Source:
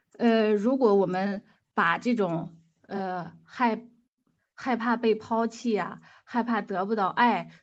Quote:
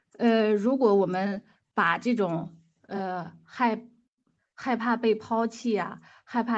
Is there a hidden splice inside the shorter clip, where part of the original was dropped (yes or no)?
no